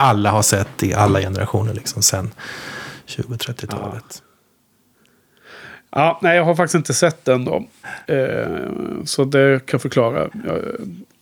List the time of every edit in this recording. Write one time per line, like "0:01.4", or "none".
none